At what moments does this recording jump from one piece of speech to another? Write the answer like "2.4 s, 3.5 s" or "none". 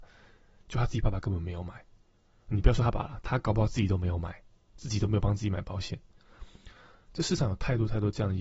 2.9 s